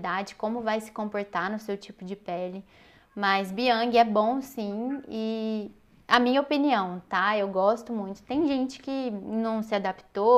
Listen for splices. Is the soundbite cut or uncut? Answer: uncut